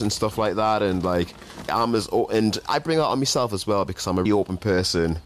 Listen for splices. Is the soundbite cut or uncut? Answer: cut